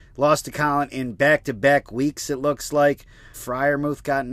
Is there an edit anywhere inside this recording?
yes; 1 cut; at 3.3 s

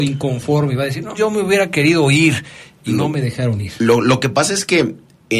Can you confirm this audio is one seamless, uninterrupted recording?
no; 1 cut; at 1.1 s

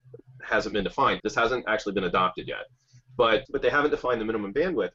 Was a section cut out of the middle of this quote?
yes; 2 cuts; at 1.2 s, 3.4 s

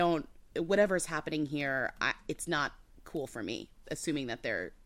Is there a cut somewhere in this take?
no; 0 cuts

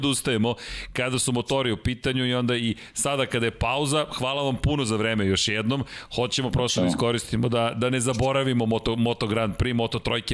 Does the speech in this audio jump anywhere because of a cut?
no; 0 cuts

